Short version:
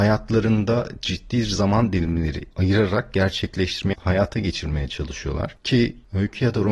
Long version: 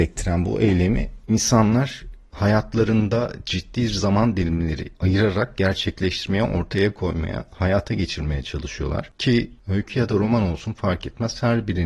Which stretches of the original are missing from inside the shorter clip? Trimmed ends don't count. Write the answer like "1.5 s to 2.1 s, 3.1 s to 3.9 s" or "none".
6.4 s to 7.5 s